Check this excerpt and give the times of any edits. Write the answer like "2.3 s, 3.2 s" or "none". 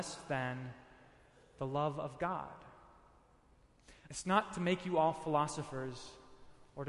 4.1 s